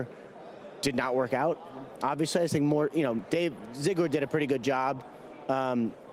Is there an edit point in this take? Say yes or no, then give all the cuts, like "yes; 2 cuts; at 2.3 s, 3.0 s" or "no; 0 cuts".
no; 0 cuts